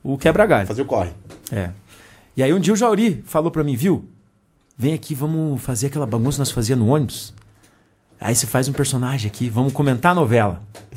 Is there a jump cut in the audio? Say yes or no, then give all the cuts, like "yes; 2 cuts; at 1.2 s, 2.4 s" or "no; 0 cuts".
no; 0 cuts